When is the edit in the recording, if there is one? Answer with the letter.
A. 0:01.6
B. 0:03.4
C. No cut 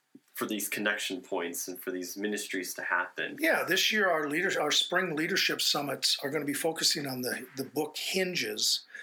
B